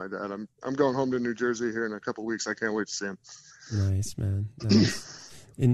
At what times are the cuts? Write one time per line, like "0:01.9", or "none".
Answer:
none